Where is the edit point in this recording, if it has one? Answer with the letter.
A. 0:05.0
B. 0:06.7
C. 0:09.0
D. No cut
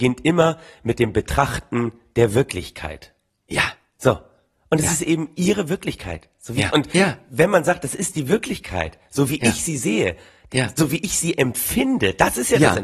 B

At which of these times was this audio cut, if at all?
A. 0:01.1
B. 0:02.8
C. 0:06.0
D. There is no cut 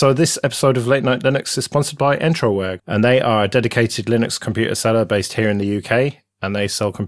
B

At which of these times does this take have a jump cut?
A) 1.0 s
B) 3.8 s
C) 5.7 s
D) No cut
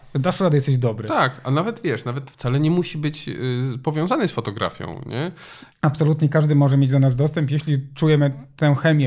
C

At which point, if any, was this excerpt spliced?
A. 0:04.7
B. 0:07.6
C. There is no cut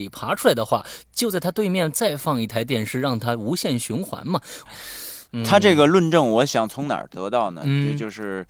A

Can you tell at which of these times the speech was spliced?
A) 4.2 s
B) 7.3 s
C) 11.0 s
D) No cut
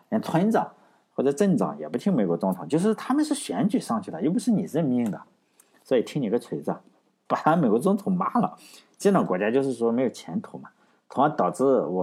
B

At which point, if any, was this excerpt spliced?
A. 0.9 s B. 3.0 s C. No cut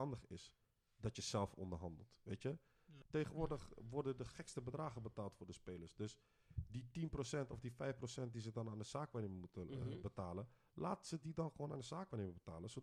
B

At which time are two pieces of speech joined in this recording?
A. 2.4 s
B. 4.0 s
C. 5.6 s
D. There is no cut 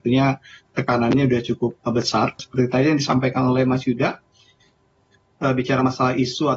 A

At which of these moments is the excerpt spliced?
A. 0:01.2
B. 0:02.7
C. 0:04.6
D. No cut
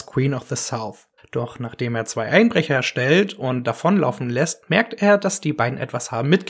A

